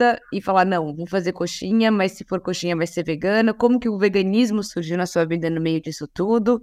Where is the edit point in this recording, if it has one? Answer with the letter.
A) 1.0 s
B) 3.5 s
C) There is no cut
C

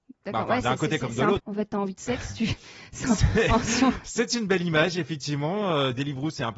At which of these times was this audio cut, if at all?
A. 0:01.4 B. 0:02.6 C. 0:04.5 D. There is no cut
A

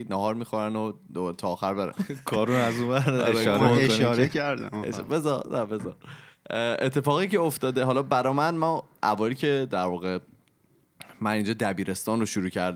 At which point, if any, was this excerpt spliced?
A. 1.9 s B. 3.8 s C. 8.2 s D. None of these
A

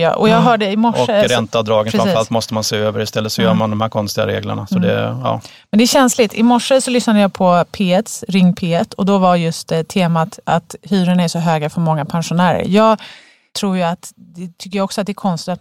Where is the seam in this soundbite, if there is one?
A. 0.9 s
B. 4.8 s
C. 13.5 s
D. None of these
D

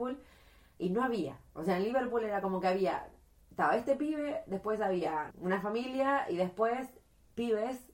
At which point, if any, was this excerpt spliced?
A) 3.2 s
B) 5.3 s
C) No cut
B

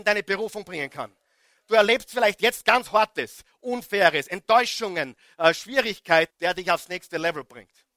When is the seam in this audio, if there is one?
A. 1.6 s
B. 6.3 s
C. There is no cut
B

